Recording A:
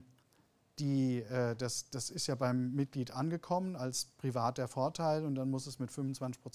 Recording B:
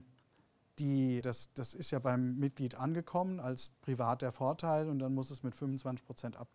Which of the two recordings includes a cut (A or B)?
B